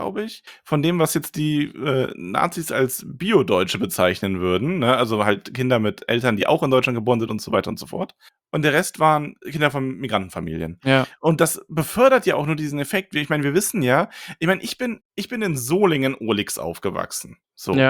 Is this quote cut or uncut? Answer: cut